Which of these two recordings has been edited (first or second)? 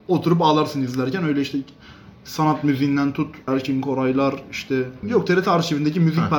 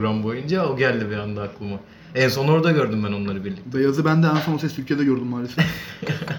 first